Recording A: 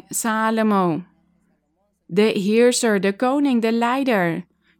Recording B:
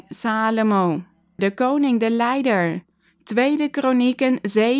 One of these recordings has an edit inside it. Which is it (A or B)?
B